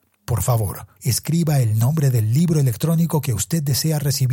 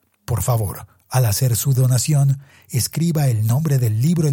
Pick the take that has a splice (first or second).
first